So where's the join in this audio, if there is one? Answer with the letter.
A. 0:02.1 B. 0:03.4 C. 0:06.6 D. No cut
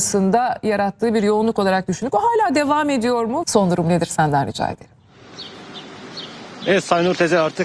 B